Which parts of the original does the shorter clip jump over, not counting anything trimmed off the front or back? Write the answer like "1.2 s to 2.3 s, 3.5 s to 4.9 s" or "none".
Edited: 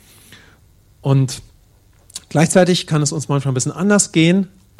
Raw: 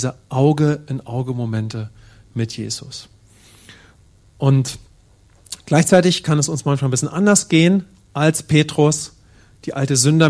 none

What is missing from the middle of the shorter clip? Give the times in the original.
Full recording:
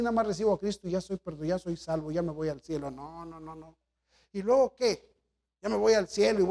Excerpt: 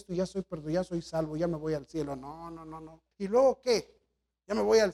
3.9 s to 4.3 s

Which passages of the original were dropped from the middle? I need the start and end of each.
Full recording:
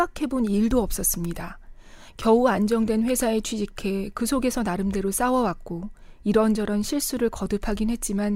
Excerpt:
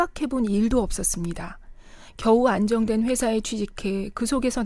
none

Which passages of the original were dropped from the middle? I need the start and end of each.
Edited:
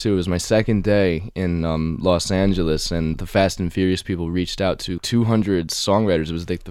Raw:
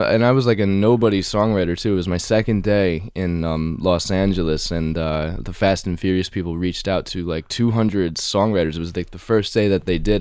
4.9 s to 5.4 s, 7.2 s to 7.4 s

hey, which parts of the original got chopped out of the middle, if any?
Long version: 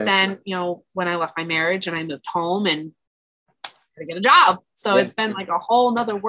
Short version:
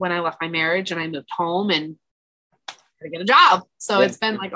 none

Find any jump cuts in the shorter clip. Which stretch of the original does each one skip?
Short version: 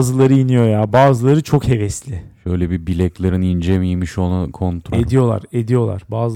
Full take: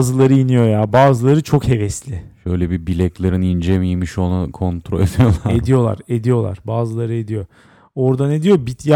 4.9 s to 5.5 s

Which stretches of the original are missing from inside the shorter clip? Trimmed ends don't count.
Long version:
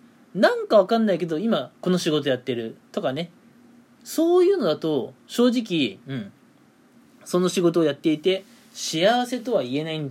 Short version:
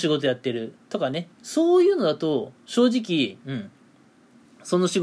3.4 s to 3.9 s

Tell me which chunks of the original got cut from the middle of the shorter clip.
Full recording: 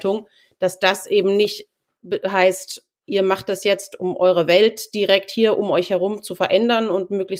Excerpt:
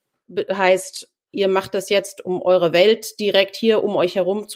none

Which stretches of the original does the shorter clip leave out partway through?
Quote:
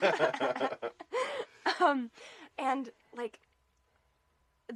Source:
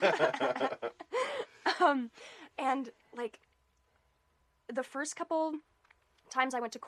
none

